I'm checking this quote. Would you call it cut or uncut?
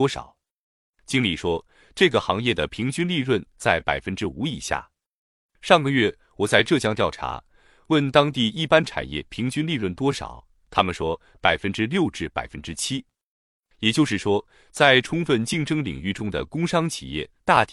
uncut